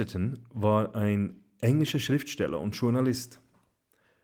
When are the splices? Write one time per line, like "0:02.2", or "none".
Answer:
none